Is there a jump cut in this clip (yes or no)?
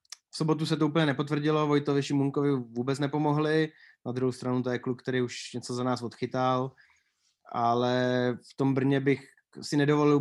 no